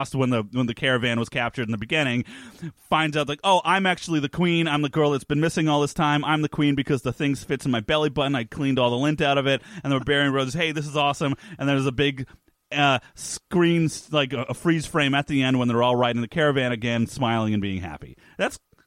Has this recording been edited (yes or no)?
no